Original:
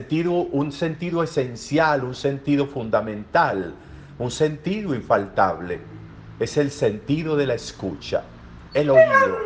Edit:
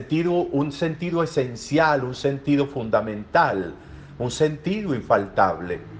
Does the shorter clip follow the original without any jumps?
yes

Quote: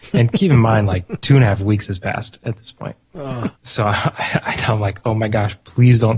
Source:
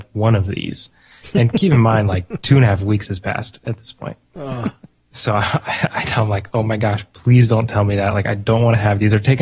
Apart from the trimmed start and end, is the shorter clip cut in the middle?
yes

